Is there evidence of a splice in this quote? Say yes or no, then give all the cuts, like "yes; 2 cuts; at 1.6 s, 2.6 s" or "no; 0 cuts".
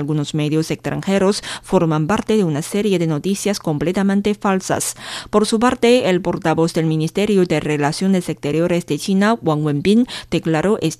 no; 0 cuts